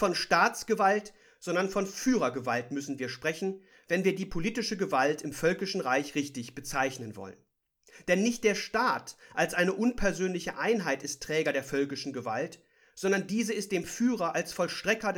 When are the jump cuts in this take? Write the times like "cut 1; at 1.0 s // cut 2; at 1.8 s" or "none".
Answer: none